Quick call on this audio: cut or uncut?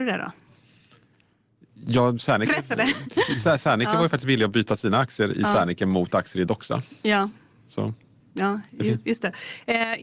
cut